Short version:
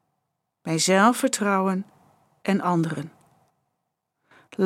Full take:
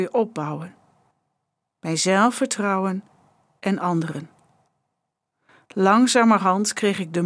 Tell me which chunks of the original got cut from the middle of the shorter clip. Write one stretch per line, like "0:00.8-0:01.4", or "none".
none

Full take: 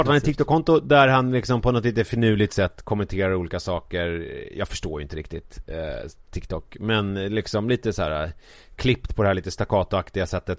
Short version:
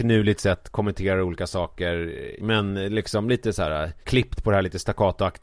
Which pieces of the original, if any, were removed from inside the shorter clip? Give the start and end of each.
0:04.5-0:06.8
0:08.4-0:08.7

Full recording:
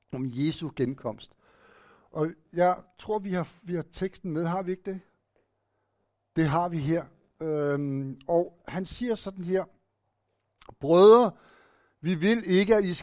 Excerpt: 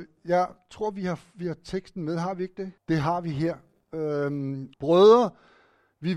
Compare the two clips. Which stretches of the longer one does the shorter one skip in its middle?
0:05.1-0:06.3
0:08.2-0:10.7

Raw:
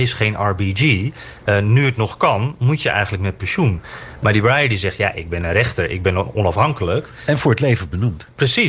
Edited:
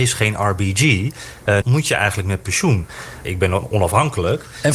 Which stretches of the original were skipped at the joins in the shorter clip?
0:01.6-0:02.6
0:04.2-0:05.9

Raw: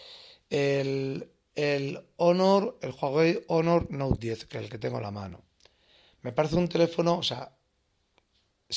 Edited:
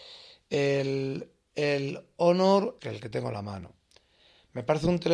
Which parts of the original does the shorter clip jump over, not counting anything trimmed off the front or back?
0:02.8-0:04.5

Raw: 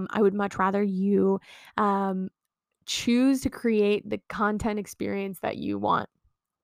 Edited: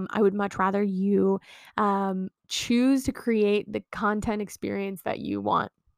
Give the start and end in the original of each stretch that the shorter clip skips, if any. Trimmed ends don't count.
0:02.4-0:02.7

